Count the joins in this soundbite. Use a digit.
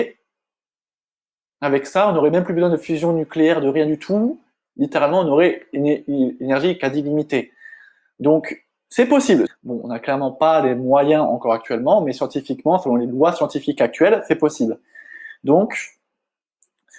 1